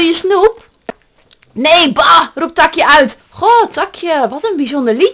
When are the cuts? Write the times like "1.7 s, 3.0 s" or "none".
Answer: 3.2 s